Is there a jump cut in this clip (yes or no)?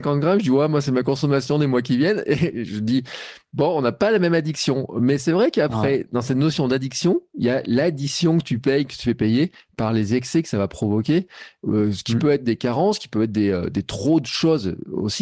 no